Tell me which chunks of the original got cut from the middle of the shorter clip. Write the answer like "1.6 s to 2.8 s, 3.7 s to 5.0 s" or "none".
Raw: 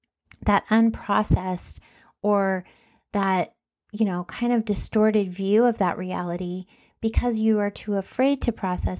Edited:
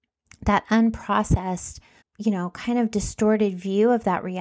2.0 s to 3.7 s